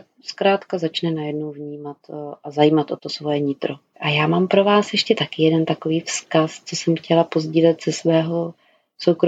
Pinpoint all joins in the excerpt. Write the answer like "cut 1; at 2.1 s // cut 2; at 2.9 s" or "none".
cut 1; at 3.9 s